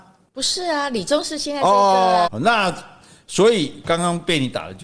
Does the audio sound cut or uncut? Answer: cut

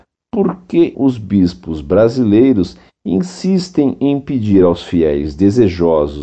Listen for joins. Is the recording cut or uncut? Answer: cut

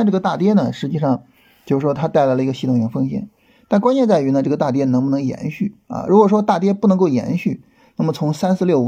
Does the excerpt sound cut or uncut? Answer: uncut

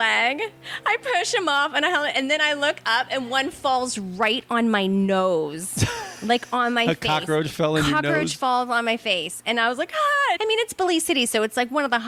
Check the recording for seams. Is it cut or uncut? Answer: cut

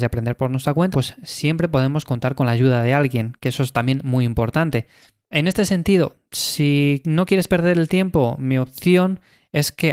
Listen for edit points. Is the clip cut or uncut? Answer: cut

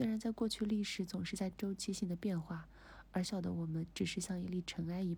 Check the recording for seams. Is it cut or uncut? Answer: cut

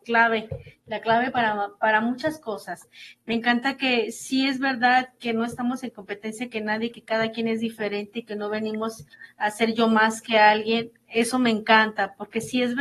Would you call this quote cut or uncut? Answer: uncut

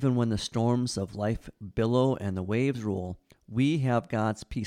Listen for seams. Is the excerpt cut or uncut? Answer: uncut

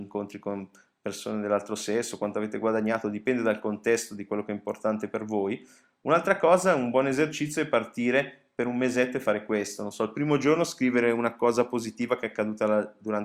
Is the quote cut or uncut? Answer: uncut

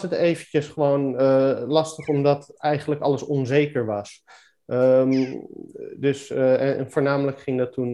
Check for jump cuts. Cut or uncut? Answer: uncut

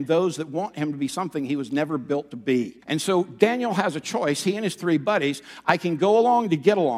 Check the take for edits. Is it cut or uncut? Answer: cut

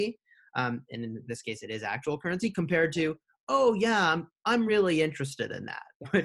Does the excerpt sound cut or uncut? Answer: uncut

